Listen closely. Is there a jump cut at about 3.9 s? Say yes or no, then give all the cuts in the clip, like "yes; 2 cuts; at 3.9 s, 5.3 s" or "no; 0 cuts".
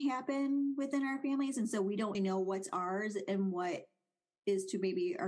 no; 1 cut; at 2.1 s